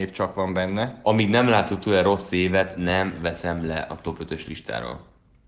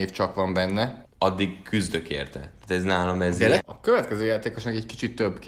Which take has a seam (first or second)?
second